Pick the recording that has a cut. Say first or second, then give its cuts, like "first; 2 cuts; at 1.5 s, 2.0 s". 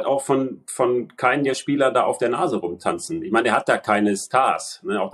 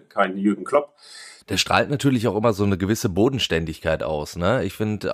second; 1 cut; at 1.4 s